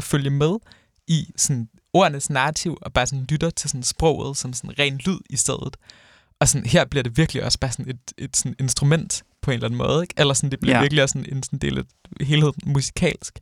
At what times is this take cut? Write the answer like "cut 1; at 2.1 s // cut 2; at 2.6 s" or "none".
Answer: cut 1; at 1.3 s